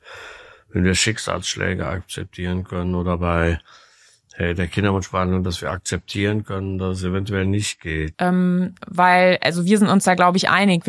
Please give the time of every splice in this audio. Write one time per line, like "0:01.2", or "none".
0:08.1

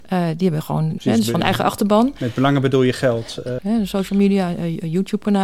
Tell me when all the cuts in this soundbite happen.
0:01.0
0:03.6

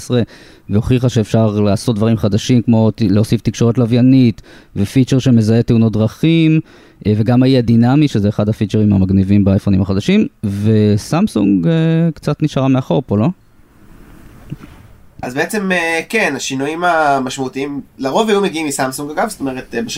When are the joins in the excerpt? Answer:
none

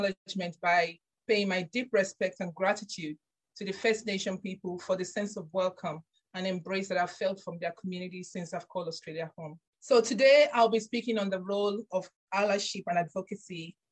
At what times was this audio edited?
0:09.7

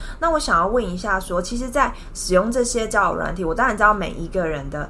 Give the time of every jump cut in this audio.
none

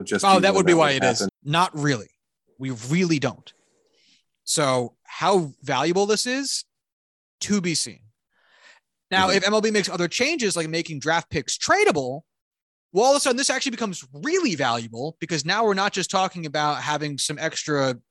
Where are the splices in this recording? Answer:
0:01.3

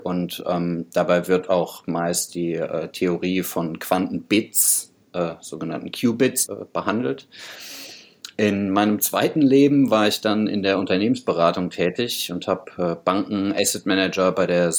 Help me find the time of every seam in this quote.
0:06.5

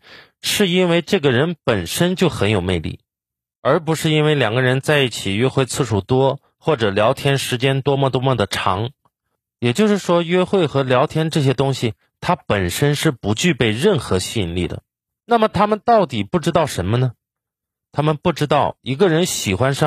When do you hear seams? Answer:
0:15.2

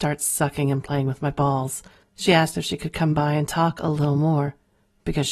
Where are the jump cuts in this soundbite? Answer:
0:02.0

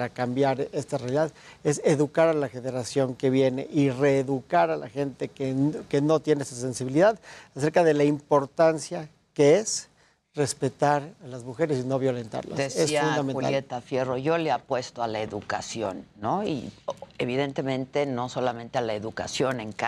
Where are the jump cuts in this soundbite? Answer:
none

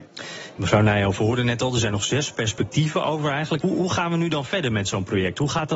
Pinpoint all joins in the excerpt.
0:03.6

